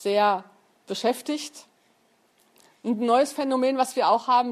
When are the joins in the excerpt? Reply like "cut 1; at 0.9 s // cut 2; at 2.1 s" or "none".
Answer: none